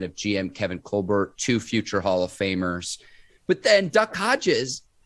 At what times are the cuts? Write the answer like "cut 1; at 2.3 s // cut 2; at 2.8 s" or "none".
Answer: cut 1; at 3.3 s